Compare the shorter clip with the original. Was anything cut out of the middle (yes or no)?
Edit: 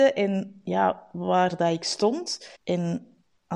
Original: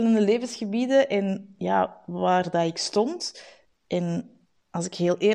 yes